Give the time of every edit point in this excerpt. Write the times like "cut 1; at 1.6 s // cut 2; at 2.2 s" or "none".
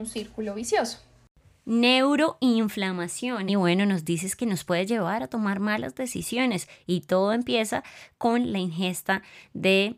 cut 1; at 3.5 s